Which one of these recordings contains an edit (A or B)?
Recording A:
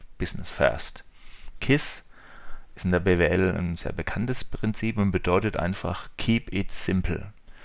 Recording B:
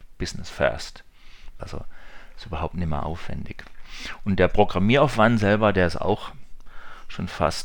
B